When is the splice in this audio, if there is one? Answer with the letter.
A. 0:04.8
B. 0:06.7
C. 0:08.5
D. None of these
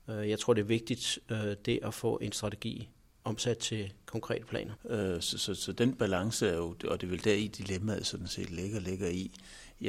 A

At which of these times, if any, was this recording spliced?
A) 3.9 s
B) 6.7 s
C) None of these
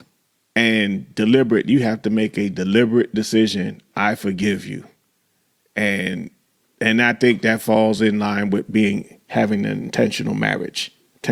C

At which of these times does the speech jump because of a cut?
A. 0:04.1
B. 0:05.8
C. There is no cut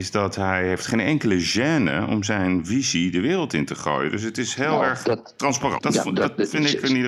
B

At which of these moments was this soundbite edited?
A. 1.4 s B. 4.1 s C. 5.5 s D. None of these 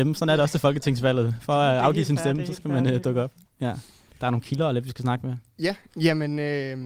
B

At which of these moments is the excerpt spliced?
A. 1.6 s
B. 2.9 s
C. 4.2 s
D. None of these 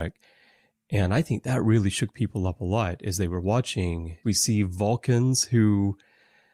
C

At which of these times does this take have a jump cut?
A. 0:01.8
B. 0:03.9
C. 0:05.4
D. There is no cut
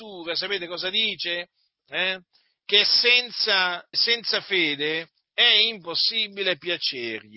B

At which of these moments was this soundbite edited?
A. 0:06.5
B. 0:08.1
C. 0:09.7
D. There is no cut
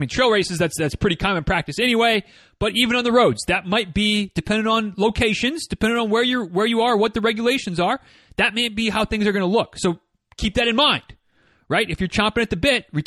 D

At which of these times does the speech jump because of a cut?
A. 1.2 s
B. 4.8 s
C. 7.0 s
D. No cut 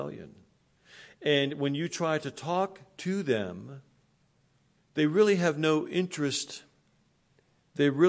B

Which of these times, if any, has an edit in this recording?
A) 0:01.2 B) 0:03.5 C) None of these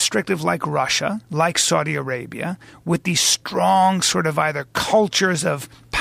A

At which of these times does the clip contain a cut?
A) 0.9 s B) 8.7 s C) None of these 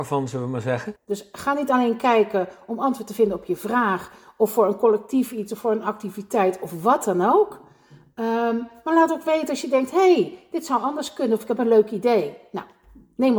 A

